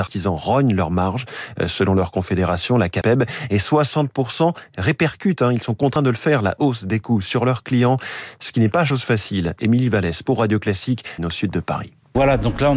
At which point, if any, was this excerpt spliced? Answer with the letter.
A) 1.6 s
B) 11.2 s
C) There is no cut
B